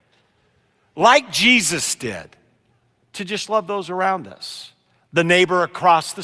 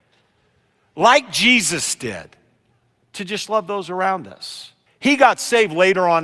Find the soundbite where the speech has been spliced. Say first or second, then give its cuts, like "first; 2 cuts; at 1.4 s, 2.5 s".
second; 1 cut; at 4.9 s